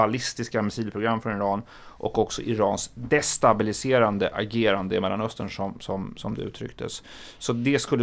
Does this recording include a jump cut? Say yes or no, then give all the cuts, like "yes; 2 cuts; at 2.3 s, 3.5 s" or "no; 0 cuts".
no; 0 cuts